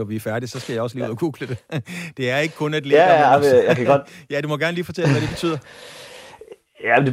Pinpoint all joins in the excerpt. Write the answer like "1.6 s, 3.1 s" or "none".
none